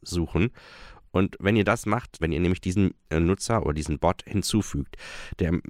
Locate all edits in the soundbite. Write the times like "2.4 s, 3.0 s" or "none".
2.2 s